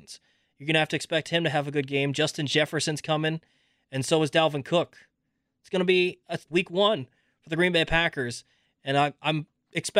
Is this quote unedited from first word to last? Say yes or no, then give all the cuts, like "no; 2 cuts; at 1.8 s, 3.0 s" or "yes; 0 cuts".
no; 1 cut; at 6.5 s